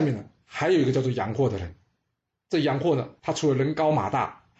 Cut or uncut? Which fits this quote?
uncut